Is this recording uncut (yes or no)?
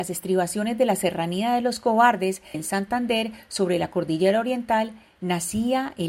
no